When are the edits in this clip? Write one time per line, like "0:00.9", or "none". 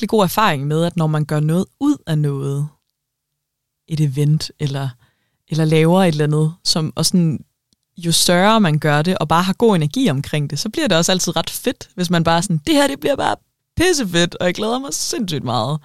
none